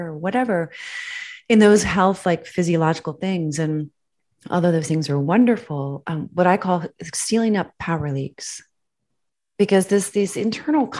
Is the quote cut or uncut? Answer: cut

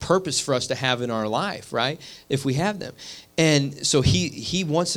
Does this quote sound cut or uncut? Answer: uncut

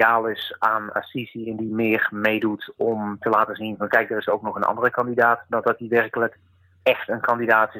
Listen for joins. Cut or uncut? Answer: uncut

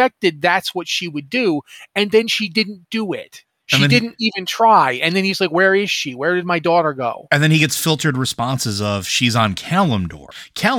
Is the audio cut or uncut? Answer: uncut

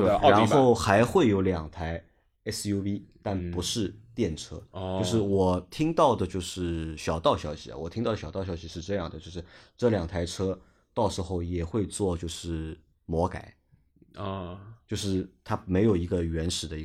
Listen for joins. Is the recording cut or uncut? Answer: uncut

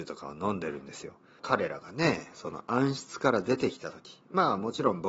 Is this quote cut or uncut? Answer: cut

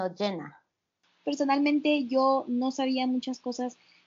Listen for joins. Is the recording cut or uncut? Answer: cut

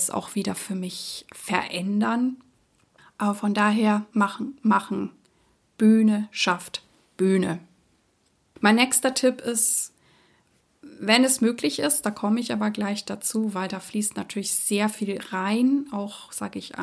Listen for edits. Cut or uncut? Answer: cut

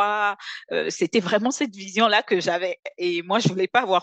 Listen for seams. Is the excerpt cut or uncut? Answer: uncut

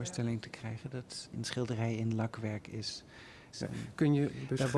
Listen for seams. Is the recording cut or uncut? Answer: cut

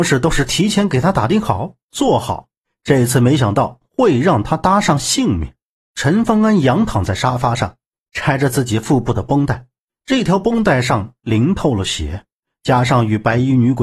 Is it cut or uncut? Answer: cut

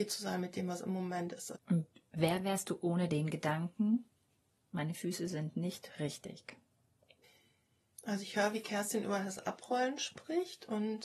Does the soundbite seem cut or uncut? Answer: cut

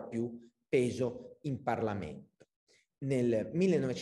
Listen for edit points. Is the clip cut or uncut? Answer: uncut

